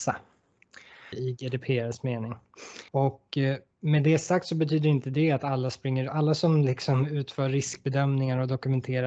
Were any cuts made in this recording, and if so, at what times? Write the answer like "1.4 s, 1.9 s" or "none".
1.1 s, 2.9 s